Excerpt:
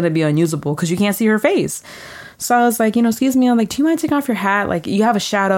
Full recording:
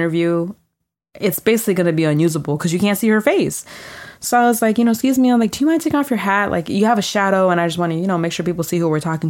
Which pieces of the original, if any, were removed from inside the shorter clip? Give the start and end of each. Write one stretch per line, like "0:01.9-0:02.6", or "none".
none